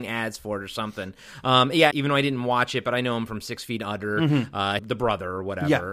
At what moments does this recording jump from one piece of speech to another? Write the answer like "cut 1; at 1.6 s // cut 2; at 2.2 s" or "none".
cut 1; at 1.9 s // cut 2; at 4.8 s